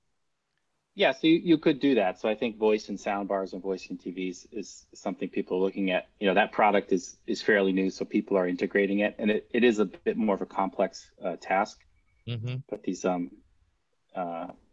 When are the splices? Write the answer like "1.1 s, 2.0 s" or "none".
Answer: none